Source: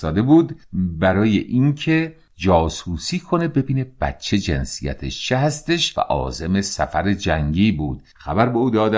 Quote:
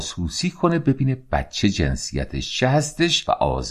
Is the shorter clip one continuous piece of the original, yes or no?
yes